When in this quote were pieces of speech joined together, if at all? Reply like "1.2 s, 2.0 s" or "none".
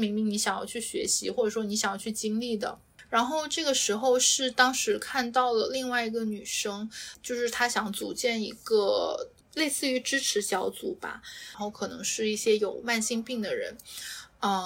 none